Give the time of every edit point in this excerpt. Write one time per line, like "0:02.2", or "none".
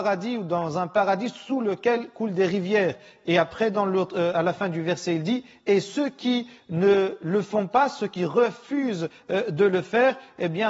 none